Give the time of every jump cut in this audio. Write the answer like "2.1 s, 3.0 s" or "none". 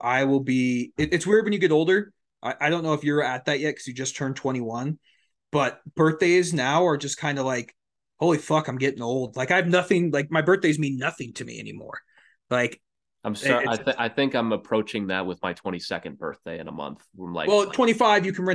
none